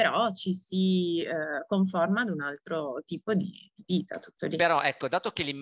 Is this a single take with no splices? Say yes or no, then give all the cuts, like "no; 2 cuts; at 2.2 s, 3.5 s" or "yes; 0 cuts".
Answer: yes; 0 cuts